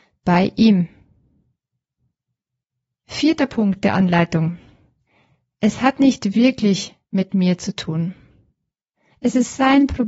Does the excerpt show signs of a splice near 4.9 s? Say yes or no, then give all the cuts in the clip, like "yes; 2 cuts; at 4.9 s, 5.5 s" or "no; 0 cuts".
no; 1 cut; at 9.1 s